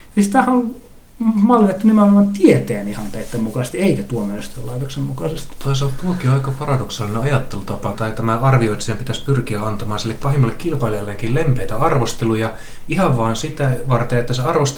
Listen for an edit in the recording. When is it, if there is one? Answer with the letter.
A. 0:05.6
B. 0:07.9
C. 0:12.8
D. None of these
B